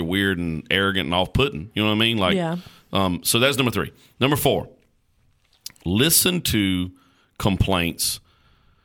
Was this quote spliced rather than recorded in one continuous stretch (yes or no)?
no